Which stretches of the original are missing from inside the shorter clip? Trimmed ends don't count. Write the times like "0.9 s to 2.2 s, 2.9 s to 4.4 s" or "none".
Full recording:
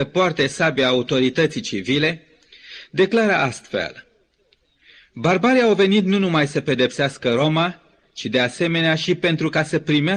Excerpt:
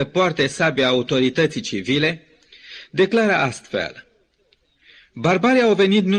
none